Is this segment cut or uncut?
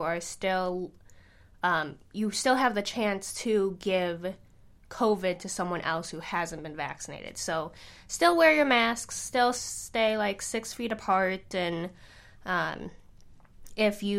uncut